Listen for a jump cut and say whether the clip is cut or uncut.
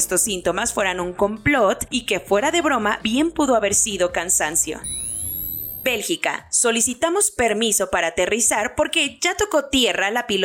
uncut